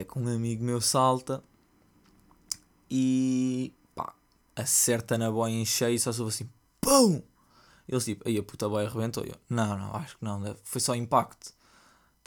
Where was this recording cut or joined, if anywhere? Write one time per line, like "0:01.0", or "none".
none